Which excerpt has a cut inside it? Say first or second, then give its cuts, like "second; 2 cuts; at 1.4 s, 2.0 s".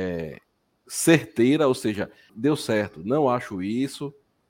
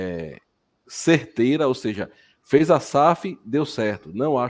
first; 1 cut; at 2.3 s